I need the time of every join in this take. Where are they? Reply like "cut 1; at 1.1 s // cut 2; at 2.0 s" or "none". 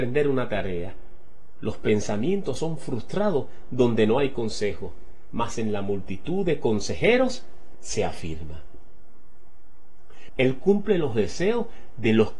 cut 1; at 7.7 s // cut 2; at 10.3 s